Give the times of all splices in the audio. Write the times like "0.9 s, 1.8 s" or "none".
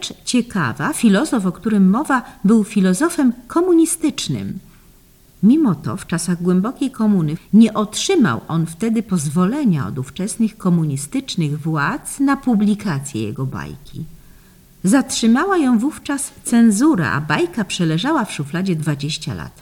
7.4 s